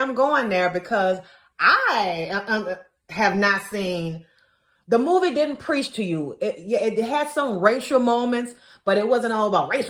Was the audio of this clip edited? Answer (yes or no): no